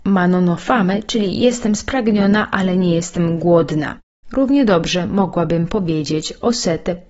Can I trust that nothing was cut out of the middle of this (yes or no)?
yes